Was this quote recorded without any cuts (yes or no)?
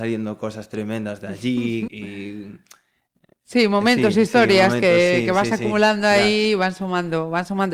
no